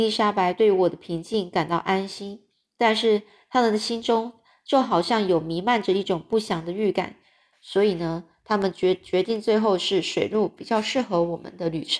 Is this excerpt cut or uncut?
cut